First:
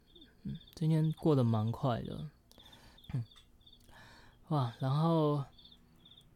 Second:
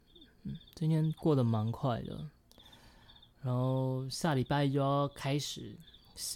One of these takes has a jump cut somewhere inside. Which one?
first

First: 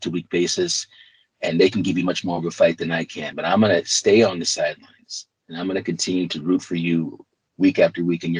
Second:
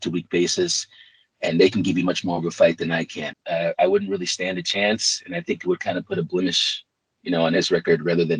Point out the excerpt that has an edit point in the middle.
second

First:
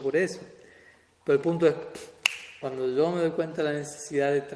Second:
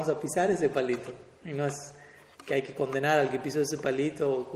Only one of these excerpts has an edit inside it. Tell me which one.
first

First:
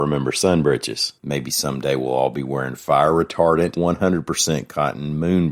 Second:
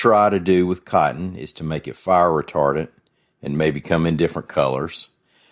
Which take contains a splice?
first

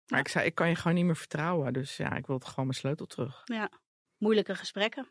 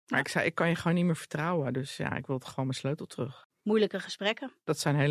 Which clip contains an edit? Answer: second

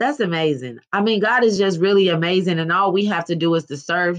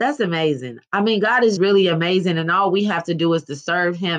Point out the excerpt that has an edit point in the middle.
second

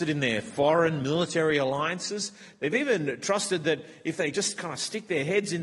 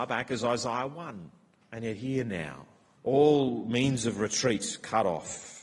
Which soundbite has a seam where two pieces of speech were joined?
second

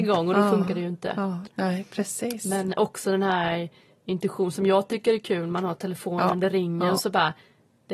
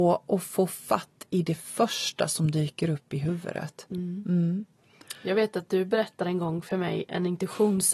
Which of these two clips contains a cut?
first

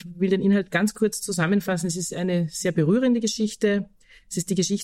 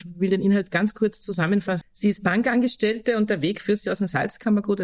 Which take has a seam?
second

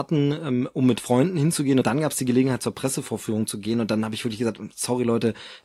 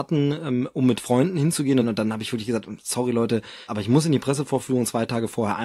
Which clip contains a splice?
second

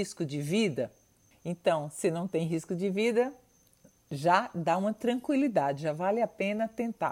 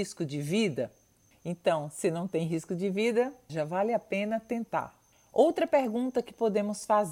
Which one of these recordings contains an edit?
second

